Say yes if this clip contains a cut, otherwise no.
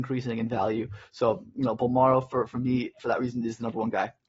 no